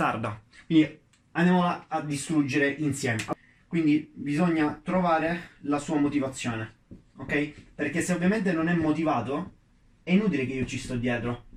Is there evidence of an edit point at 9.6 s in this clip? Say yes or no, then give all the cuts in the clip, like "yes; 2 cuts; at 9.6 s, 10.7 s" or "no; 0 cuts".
no; 0 cuts